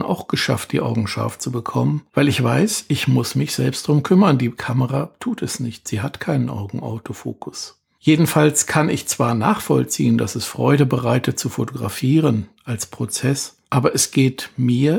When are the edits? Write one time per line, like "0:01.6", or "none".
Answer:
none